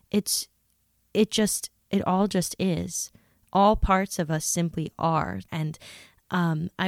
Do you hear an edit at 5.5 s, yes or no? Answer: yes